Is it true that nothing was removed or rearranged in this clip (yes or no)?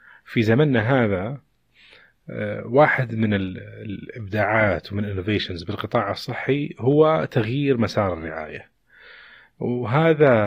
yes